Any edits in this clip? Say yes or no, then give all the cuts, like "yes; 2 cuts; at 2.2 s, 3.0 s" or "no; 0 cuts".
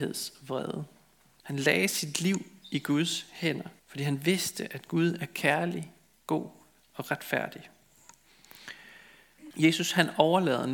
yes; 3 cuts; at 1.4 s, 3.8 s, 9.5 s